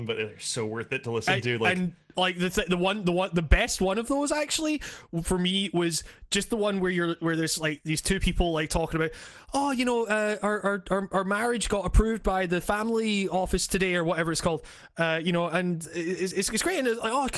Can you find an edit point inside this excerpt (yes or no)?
no